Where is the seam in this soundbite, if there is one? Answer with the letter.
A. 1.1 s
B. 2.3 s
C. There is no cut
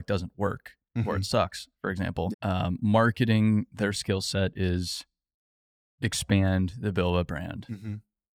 B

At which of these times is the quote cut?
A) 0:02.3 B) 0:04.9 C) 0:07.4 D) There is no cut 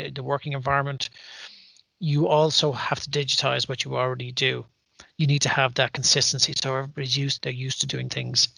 C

